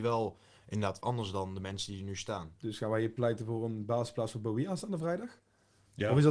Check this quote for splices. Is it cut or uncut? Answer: cut